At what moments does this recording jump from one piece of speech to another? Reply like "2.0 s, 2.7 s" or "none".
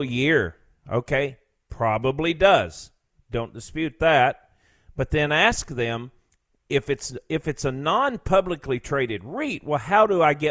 none